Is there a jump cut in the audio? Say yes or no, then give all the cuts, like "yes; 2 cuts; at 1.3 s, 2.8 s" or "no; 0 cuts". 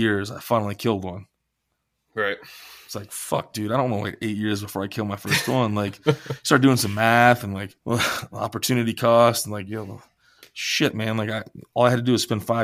yes; 1 cut; at 7.8 s